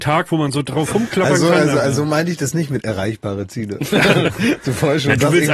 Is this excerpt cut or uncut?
cut